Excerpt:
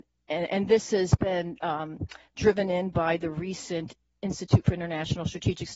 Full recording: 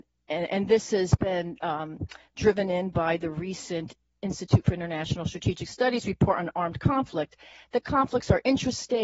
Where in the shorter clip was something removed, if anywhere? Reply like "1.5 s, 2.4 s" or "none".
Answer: none